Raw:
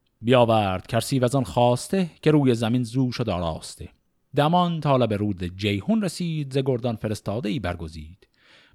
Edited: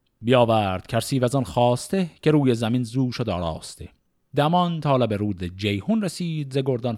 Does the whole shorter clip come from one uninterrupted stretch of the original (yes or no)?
yes